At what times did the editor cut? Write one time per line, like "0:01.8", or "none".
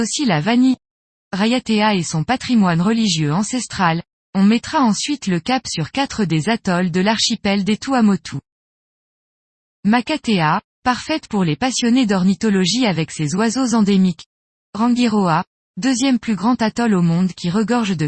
0:04.3
0:14.5